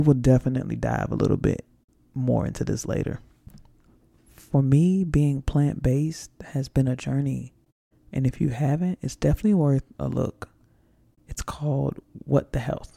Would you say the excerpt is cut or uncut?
cut